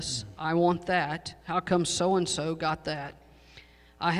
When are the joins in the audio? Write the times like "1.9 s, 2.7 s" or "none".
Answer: 1.4 s

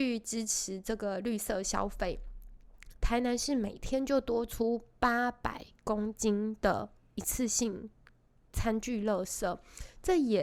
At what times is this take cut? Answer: 2.9 s

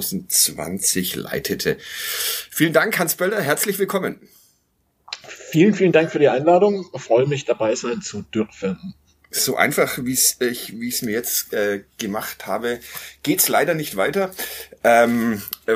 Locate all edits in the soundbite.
none

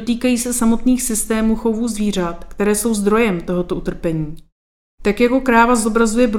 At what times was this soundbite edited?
none

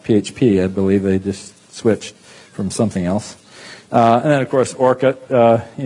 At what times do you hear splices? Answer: none

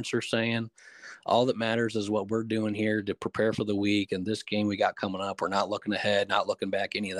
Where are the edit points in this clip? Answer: none

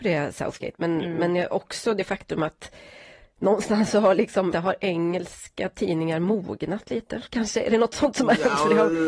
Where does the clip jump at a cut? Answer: 4.5 s

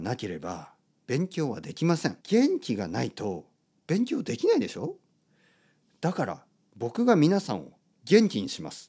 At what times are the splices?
2.2 s

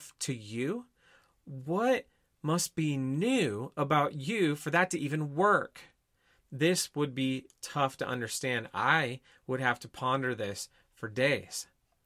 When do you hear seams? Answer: none

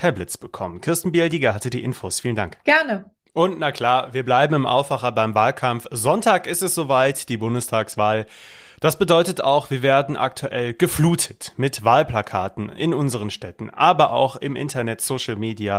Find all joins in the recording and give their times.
none

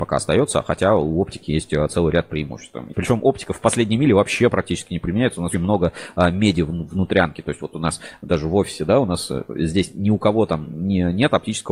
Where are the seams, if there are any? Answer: 2.9 s, 5.5 s

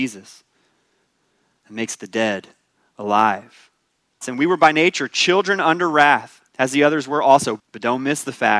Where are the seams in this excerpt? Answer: 4.2 s, 6.5 s, 7.6 s

